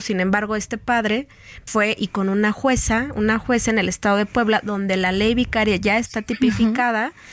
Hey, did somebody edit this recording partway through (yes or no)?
yes